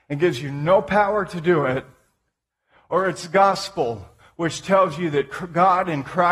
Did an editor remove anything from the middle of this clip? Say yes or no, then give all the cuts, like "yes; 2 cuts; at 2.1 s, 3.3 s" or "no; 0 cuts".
no; 0 cuts